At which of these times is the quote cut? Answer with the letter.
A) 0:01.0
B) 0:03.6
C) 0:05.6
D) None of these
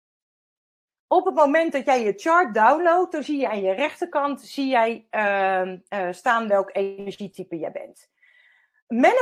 D